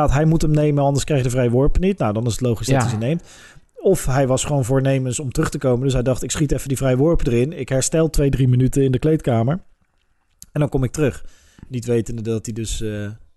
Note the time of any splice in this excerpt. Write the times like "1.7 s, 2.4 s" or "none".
none